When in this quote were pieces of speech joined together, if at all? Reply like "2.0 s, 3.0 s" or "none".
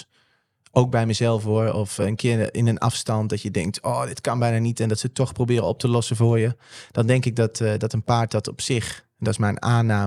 none